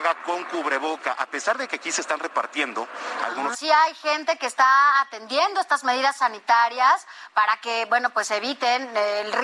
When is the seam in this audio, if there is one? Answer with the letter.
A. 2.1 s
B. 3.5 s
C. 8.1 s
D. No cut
B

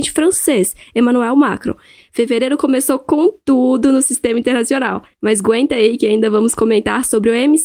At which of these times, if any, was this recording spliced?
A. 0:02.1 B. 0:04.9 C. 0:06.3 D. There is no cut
A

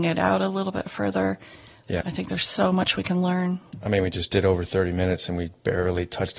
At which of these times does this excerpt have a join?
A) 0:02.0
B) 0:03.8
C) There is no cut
A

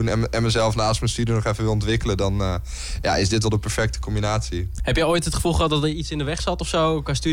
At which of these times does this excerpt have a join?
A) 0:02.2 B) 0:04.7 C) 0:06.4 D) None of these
B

